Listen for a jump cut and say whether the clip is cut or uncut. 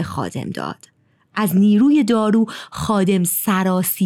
uncut